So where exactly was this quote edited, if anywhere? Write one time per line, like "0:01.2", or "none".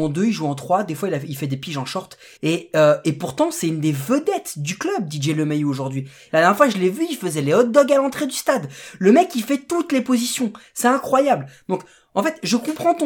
0:02.4
0:06.3